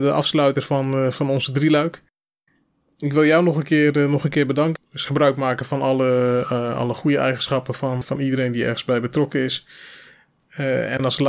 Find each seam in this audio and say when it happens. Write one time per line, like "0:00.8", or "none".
0:04.8
0:08.0

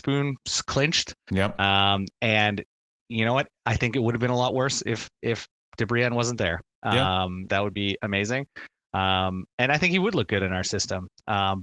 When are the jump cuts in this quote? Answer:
0:07.5

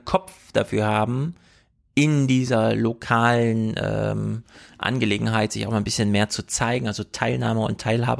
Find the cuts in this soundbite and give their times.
none

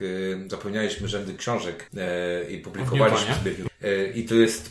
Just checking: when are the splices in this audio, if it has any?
0:01.9
0:03.7

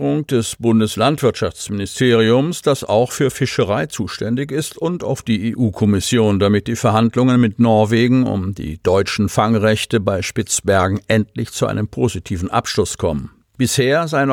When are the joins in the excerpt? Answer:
none

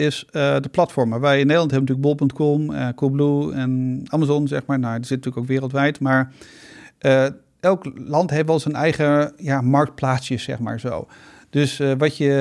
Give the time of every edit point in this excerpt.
none

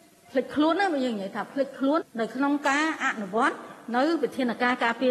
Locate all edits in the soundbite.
0:02.0

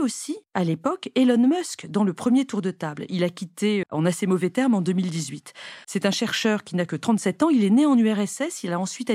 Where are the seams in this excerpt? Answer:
0:03.8
0:05.8

